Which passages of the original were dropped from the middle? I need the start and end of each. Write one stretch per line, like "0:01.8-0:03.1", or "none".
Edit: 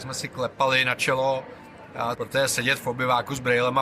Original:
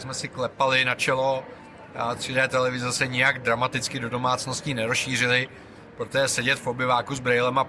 0:02.1-0:05.9